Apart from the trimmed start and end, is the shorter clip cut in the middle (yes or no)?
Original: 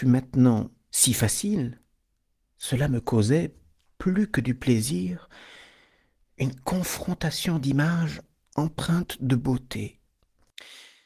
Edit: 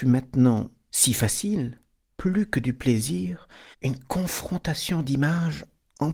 yes